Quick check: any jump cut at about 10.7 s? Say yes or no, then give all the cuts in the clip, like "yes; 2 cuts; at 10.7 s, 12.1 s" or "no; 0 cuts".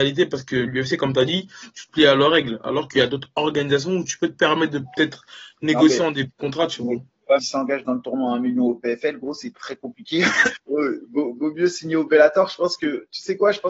yes; 3 cuts; at 7.4 s, 9.6 s, 10.7 s